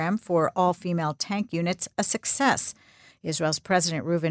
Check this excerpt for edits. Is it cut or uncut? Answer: cut